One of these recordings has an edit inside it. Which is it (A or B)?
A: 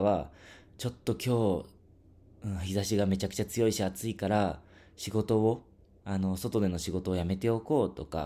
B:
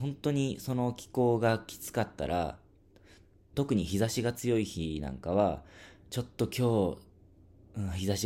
B